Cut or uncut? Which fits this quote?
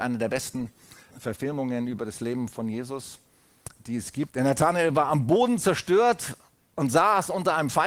cut